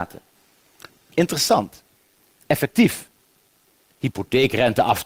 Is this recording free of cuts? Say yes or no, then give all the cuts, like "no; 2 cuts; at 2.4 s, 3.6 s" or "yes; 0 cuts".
no; 1 cut; at 0.9 s